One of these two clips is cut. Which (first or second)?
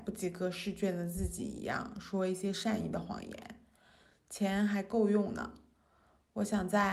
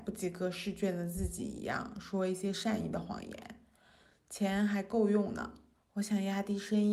second